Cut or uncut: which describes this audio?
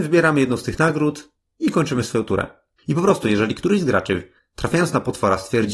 cut